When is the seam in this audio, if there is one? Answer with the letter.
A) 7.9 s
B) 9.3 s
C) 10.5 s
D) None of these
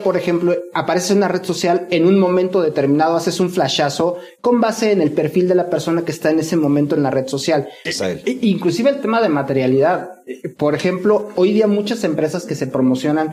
A